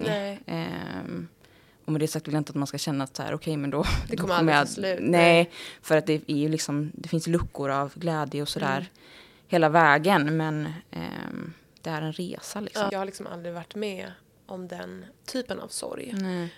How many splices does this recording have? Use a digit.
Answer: 2